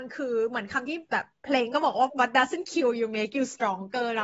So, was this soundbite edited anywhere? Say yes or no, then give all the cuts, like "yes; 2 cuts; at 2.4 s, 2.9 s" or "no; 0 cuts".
yes; 1 cut; at 2.1 s